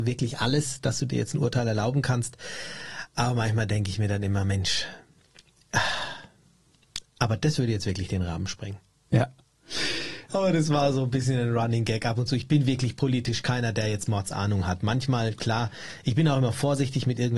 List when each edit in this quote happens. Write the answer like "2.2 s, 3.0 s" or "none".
10.3 s